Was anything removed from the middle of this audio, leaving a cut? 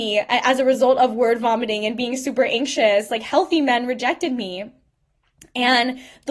no; 0 cuts

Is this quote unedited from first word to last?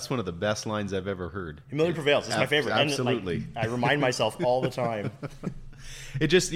yes; 0 cuts

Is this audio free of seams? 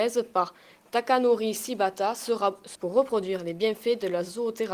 no; 1 cut; at 2.7 s

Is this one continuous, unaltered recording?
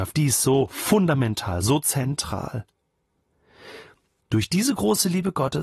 no; 1 cut; at 4.2 s

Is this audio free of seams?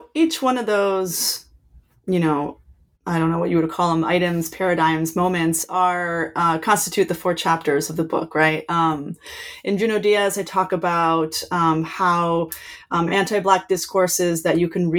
yes; 0 cuts

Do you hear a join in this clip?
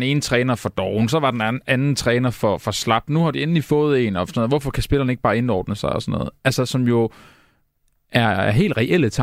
no; 0 cuts

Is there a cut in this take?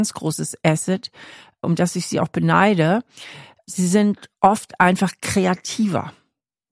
no; 0 cuts

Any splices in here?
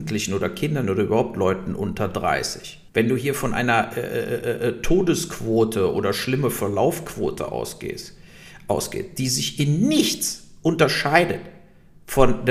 yes; 1 cut; at 2.9 s

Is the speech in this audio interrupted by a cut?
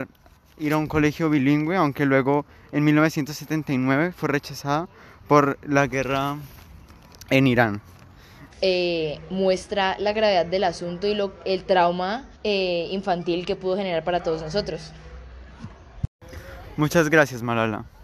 yes; 2 cuts; at 8.5 s, 12.3 s

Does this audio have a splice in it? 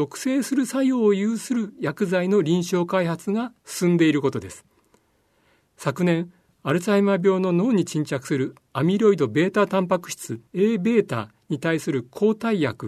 yes; 1 cut; at 10.5 s

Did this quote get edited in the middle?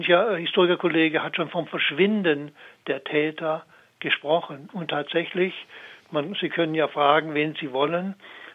no; 0 cuts

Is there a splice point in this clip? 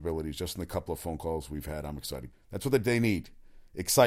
yes; 1 cut; at 2.3 s

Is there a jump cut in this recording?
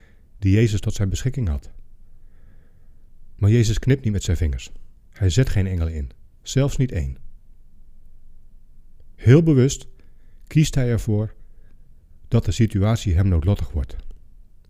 yes; 3 cuts; at 3.4 s, 5.0 s, 9.1 s

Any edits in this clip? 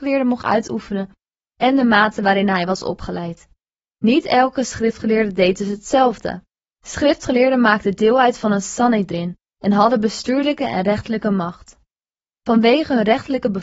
no; 0 cuts

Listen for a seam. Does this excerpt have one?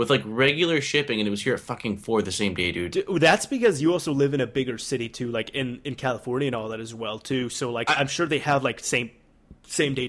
no; 0 cuts

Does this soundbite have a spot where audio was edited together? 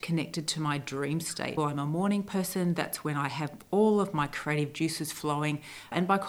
yes; 1 cut; at 1.6 s

